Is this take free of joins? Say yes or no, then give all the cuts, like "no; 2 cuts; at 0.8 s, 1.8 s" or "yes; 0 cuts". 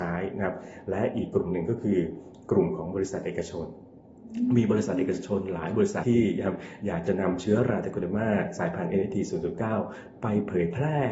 no; 1 cut; at 6.0 s